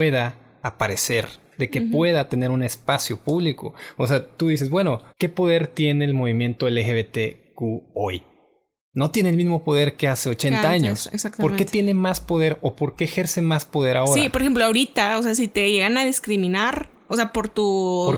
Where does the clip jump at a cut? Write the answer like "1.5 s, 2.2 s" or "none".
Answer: 5.1 s